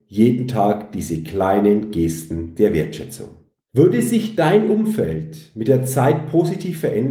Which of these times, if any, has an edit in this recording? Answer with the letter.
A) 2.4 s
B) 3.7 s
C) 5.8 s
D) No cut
B